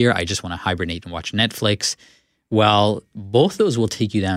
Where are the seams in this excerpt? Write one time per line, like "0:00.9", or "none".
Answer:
none

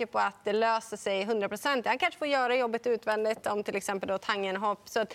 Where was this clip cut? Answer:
none

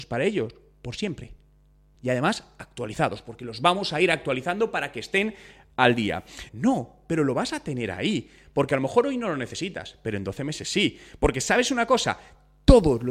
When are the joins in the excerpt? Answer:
0:01.9
0:06.5

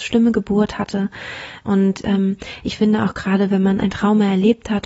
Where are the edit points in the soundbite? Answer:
0:01.6

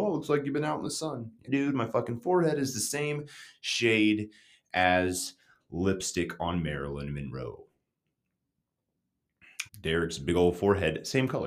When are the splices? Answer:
0:01.5
0:09.7

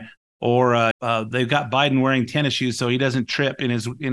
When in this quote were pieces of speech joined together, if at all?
0:00.9

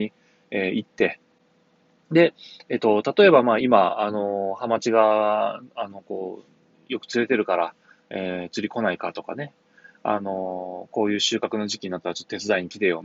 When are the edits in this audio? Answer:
none

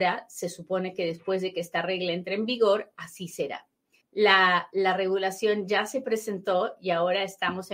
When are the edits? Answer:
0:04.0

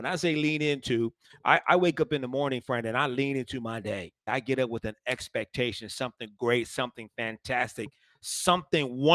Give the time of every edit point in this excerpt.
0:04.3

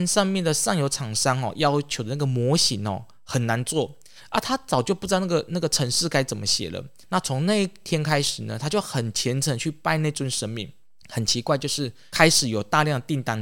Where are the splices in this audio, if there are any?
0:07.0

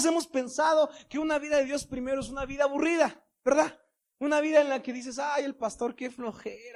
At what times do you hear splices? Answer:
none

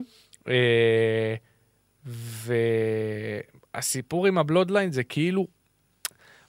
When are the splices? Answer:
none

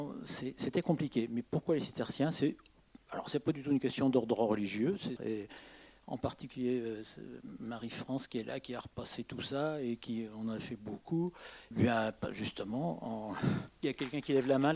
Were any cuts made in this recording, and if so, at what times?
0:05.2
0:11.7
0:13.7

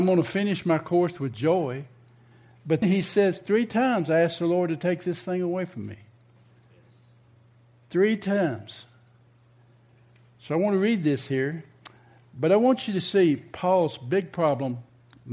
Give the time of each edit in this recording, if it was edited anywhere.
0:02.8

